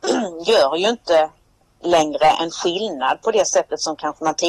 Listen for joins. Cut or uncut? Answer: uncut